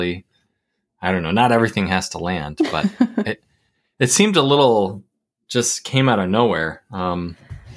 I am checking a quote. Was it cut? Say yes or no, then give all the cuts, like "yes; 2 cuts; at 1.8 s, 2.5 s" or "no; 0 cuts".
no; 0 cuts